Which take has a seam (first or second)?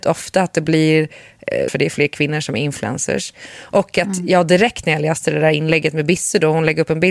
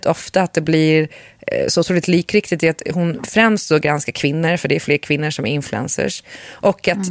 first